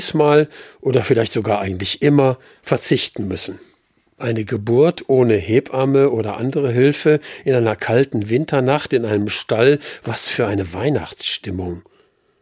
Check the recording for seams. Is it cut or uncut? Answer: cut